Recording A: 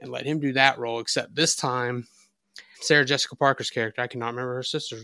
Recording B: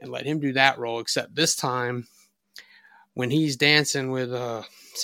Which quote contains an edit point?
A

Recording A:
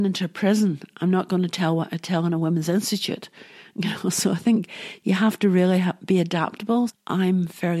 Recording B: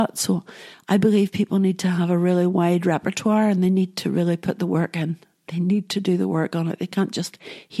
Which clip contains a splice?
A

